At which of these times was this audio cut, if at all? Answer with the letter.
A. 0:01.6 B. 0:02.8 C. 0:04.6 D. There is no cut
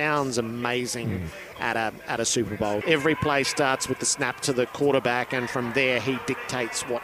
B